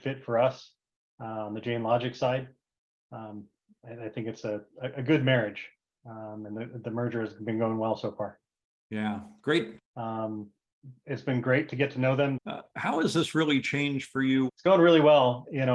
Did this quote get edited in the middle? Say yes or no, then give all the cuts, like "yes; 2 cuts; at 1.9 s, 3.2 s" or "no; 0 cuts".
yes; 3 cuts; at 9.8 s, 12.4 s, 14.5 s